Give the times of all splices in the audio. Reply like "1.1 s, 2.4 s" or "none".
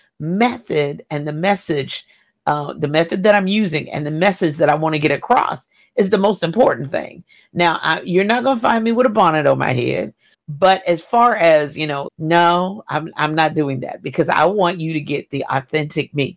10.3 s, 12.1 s